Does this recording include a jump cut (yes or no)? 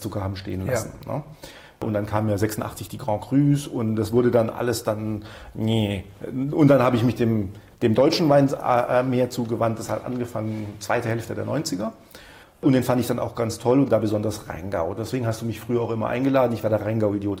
yes